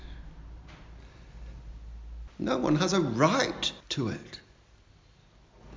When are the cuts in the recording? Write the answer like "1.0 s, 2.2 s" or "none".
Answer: 2.3 s, 3.8 s

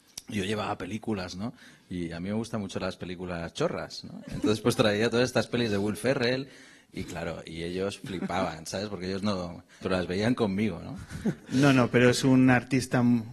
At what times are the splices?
9.8 s, 11.4 s

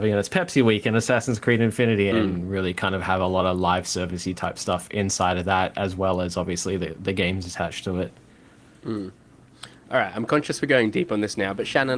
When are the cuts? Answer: 2.1 s

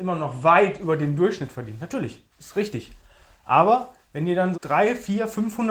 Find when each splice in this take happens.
2.3 s, 4.5 s

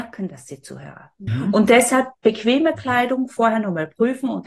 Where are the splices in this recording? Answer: 1.3 s

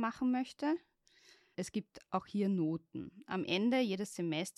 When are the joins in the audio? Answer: 1.5 s

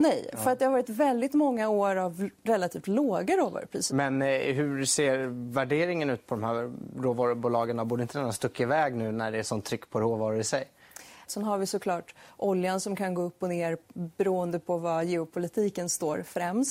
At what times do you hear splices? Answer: 3.9 s, 11.3 s

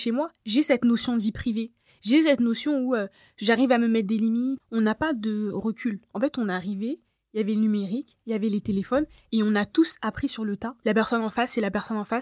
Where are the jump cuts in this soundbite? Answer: 4.6 s, 10.8 s

